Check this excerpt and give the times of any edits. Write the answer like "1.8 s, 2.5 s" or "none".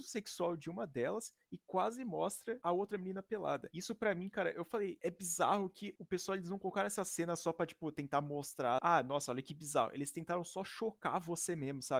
8.8 s